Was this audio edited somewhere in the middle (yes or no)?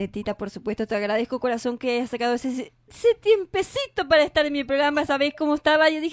no